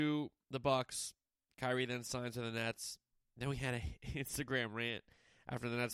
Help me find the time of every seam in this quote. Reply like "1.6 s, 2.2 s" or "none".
none